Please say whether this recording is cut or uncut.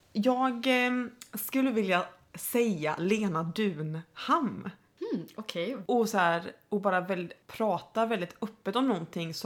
cut